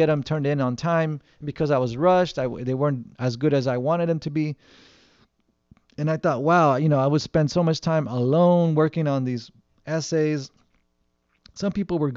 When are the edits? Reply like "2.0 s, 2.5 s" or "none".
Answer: none